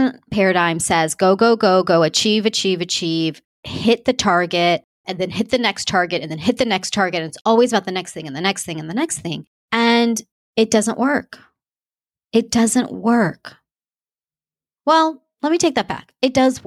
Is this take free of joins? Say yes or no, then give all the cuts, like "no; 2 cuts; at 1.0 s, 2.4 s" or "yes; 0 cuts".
yes; 0 cuts